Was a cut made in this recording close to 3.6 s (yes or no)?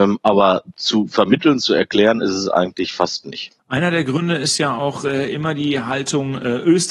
yes